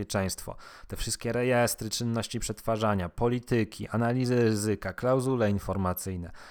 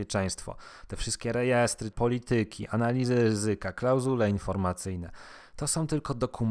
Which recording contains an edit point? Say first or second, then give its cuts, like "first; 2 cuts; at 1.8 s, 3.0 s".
second; 1 cut; at 1.9 s